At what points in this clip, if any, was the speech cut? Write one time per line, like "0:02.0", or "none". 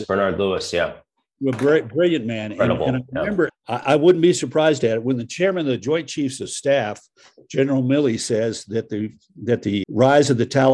0:03.5
0:09.8